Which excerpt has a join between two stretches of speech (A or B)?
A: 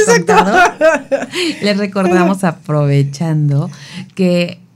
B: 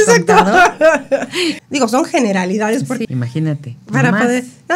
B